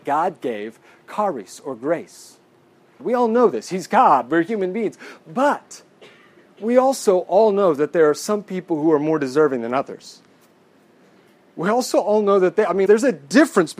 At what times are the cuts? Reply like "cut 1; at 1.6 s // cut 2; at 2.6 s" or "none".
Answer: cut 1; at 3.0 s // cut 2; at 12.9 s